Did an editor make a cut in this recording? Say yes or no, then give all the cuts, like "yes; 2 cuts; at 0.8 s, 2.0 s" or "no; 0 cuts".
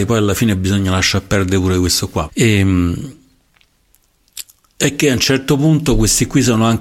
yes; 1 cut; at 2.3 s